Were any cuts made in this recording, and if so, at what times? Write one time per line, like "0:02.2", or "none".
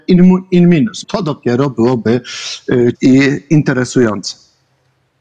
0:01.0
0:02.9